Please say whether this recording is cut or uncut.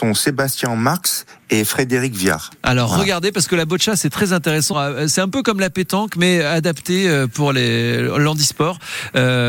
cut